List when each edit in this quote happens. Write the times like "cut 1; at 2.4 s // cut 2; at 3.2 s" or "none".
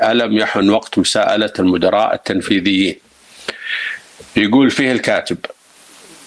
cut 1; at 4.3 s